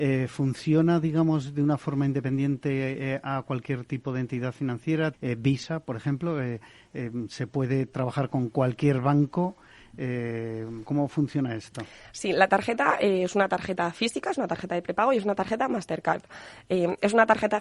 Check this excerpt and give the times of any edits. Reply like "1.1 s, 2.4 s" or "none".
5.1 s, 10.9 s

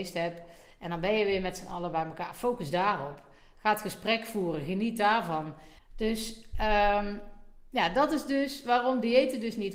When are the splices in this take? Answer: 5.8 s

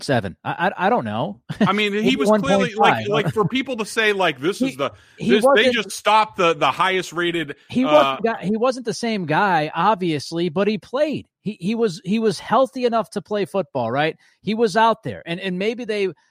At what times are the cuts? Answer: 8.2 s

